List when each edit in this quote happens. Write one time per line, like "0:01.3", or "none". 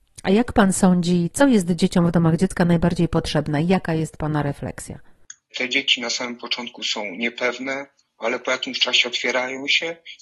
0:05.5
0:08.1